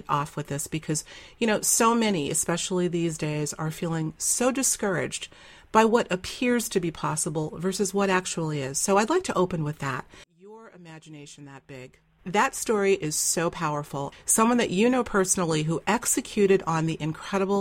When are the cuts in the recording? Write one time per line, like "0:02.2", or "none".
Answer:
0:10.2
0:12.2
0:14.1